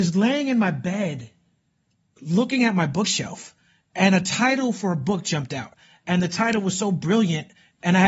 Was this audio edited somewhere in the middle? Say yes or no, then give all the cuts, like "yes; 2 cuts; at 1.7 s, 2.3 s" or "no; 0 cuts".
no; 0 cuts